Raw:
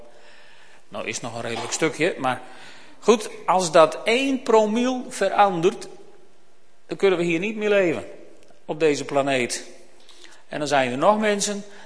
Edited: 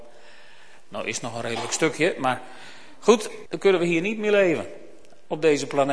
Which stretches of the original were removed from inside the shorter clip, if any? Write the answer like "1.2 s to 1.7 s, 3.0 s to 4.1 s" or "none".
3.5 s to 6.8 s